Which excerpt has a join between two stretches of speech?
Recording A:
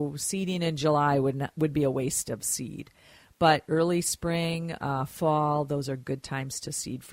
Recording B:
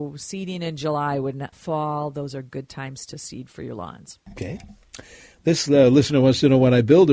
B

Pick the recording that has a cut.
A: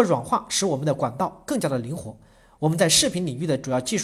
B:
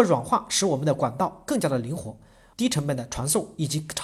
B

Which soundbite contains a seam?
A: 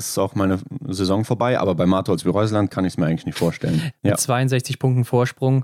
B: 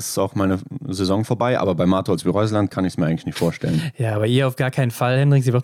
A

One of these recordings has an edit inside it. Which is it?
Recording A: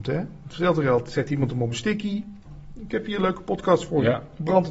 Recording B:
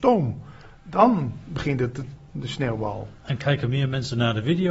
B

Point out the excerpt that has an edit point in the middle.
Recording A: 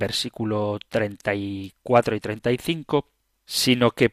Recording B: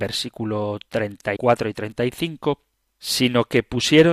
B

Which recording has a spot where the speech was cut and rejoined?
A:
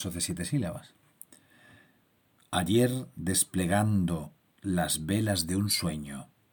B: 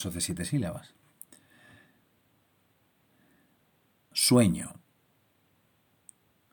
A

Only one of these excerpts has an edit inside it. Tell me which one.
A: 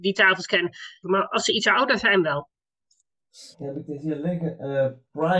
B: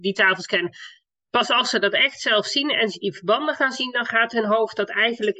A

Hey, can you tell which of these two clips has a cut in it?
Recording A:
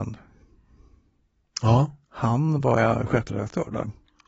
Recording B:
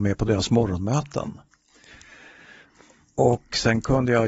A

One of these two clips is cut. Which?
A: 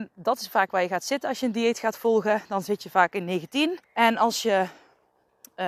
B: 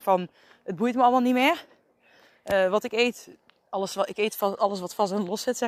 A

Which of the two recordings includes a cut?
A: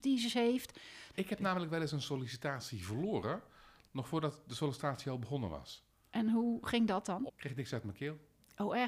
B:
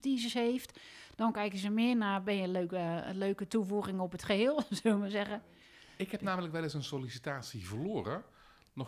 A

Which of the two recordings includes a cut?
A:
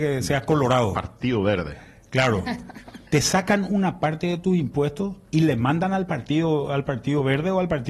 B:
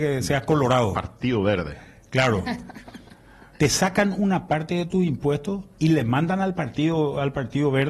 A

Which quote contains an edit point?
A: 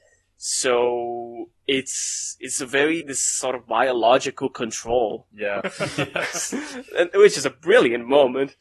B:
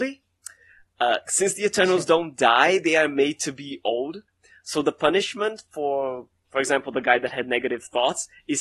A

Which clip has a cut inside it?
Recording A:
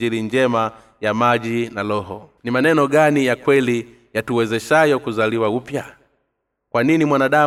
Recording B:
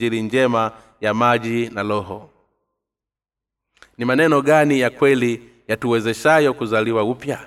A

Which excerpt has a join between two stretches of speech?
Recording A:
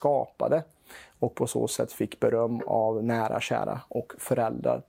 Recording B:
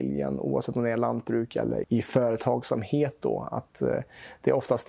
B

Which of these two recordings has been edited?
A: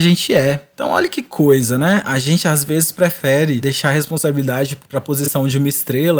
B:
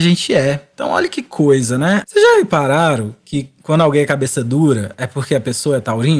B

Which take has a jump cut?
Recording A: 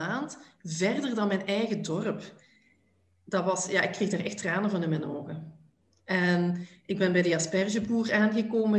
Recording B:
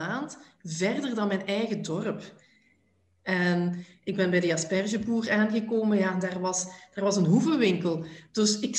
B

